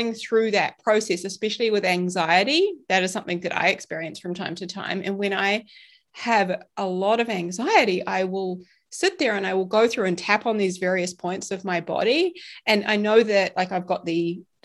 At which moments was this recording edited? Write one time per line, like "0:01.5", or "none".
none